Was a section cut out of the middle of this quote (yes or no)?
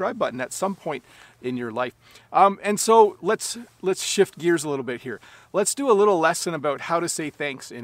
no